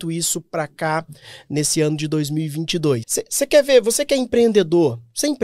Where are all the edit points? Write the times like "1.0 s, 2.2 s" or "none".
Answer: 3.0 s